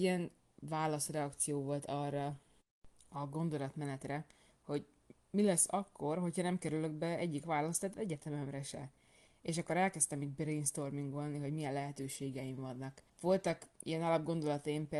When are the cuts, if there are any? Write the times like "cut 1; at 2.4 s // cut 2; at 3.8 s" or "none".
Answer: cut 1; at 13.1 s

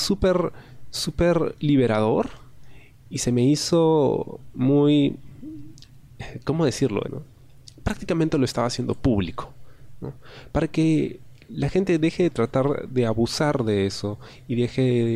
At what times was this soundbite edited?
cut 1; at 7.0 s

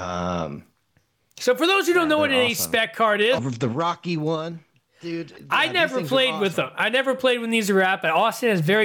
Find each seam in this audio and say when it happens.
cut 1; at 3.4 s

